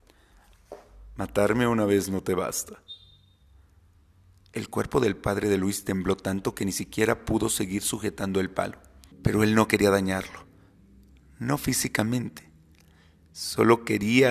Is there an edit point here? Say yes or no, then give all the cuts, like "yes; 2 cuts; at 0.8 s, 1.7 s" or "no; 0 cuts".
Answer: yes; 1 cut; at 9.1 s